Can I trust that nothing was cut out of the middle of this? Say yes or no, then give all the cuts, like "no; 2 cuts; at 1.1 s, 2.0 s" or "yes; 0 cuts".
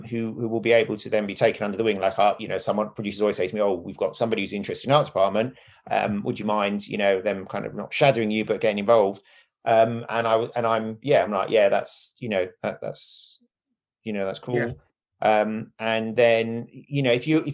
yes; 0 cuts